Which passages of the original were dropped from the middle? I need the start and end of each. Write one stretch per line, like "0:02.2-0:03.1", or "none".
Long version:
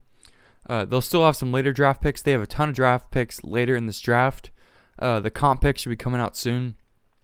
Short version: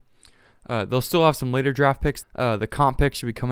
0:02.2-0:04.9